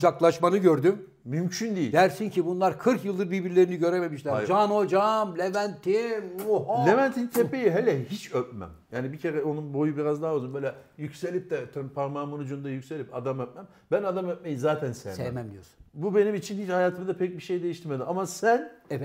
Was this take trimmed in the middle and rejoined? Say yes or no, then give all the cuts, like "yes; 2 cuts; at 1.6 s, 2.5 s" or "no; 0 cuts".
no; 0 cuts